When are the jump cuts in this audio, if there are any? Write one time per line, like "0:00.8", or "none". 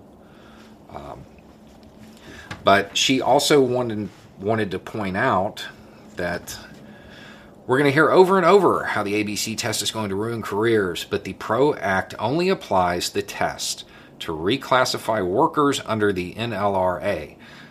none